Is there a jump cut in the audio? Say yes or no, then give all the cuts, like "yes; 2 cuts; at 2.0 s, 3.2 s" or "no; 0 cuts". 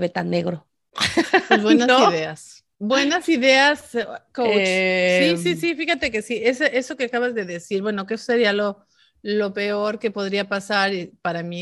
no; 0 cuts